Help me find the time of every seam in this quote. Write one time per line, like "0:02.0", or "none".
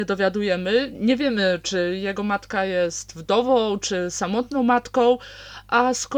none